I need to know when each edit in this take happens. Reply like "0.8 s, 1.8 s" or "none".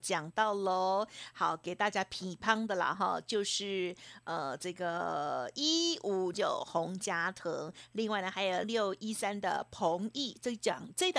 6.3 s, 8.6 s